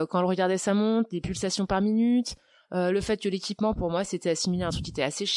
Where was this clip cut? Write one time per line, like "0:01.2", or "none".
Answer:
none